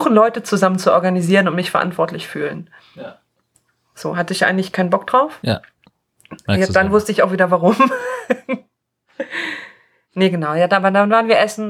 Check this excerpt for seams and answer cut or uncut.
uncut